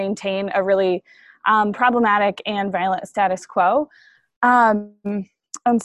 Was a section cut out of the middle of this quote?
no; 0 cuts

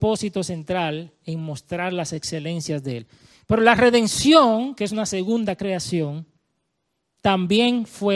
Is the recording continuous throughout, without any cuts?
yes; 0 cuts

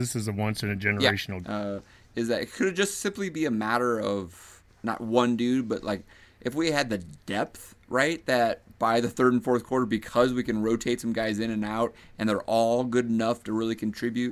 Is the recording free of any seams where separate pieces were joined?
no; 2 cuts; at 1.4 s, 4.7 s

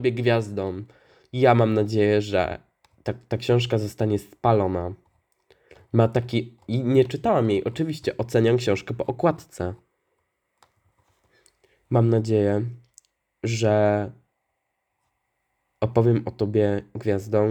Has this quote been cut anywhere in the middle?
no; 0 cuts

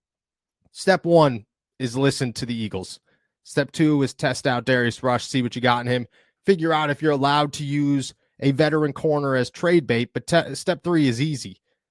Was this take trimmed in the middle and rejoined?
no; 0 cuts

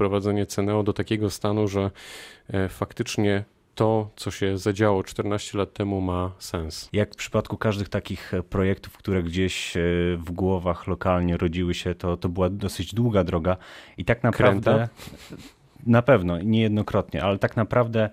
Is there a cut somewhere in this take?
yes; 1 cut; at 6.9 s

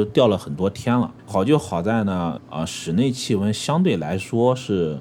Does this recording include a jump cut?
yes; 2 cuts; at 1.2 s, 2.4 s

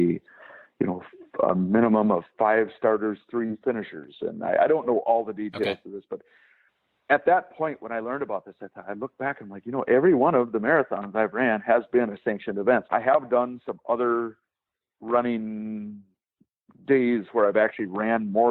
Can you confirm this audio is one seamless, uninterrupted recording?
no; 1 cut; at 12.9 s

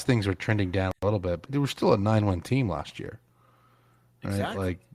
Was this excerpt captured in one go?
no; 1 cut; at 1.5 s

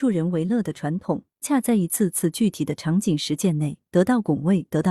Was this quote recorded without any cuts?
no; 1 cut; at 1.4 s

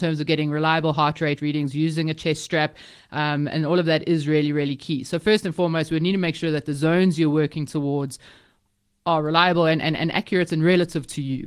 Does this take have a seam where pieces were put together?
no; 0 cuts

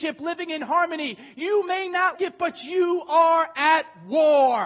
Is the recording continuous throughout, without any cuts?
no; 1 cut; at 2.1 s

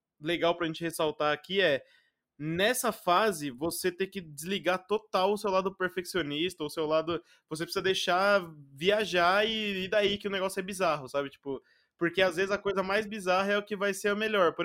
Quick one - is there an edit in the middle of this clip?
no; 0 cuts

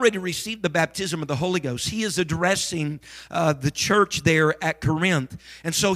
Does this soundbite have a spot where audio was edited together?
no; 0 cuts

